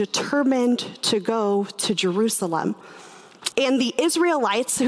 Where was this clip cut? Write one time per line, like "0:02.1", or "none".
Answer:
0:03.5

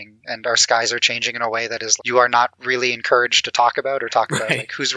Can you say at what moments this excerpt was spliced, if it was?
0:02.0

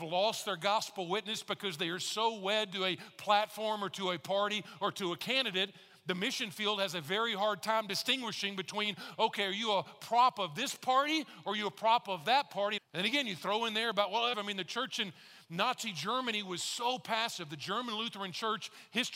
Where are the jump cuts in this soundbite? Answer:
0:12.8
0:14.3

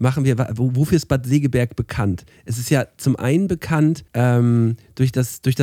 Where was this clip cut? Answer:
0:04.1

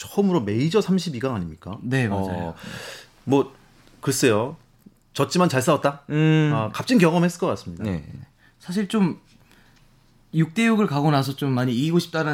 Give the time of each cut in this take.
none

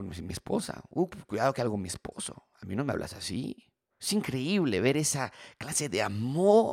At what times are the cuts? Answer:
0:03.9

